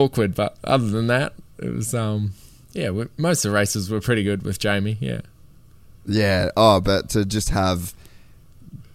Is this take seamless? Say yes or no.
yes